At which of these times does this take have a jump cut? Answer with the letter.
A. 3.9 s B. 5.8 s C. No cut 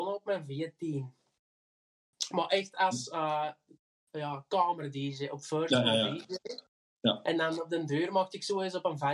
C